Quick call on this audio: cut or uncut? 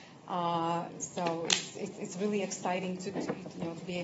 uncut